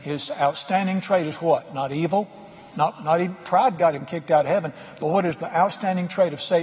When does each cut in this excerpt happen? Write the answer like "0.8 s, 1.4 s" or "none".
2.7 s